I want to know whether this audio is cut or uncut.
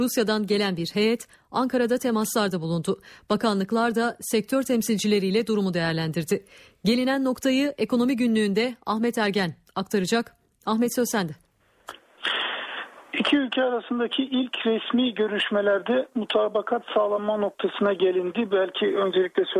uncut